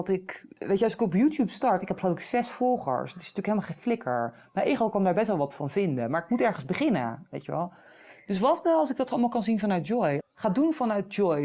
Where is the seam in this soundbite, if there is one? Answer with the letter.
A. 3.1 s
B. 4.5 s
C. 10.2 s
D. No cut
C